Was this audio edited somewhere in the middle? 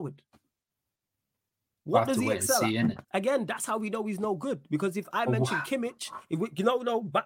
yes; 1 cut; at 3.0 s

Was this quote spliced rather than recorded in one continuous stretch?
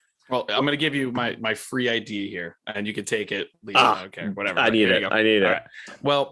no; 0 cuts

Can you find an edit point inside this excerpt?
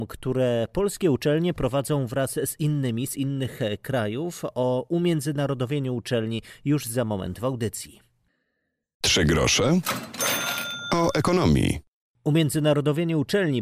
no; 0 cuts

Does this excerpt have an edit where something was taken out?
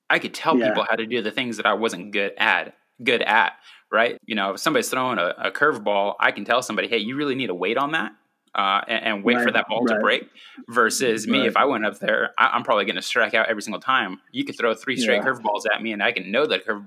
yes; 1 cut; at 4.2 s

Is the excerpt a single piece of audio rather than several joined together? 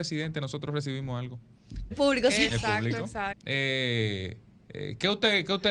no; 2 cuts; at 1.9 s, 3.3 s

